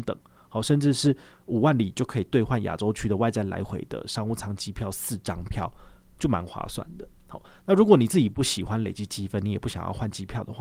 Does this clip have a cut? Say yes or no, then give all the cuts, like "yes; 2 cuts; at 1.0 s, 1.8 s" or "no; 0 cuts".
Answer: no; 0 cuts